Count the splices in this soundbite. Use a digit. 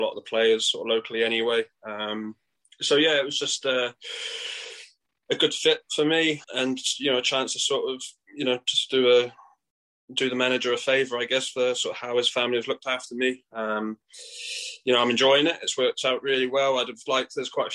1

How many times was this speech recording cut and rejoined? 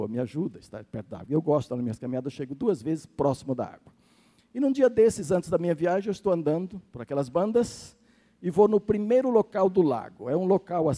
1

